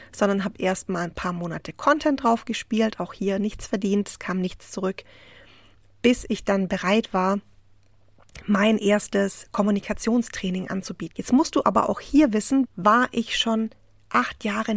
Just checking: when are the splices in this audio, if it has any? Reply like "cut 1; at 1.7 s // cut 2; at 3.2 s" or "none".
cut 1; at 11.1 s // cut 2; at 12.7 s